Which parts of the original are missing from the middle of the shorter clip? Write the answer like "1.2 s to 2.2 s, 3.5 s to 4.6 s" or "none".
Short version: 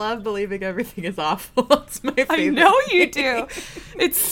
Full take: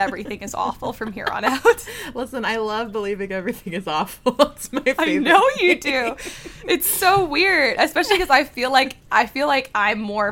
none